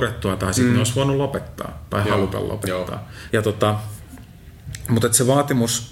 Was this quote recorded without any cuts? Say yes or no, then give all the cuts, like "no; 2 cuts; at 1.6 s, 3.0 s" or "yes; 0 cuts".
no; 1 cut; at 3.3 s